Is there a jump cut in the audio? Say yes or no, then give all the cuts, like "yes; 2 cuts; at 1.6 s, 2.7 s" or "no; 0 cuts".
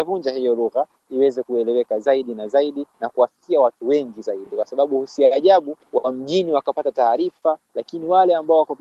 no; 0 cuts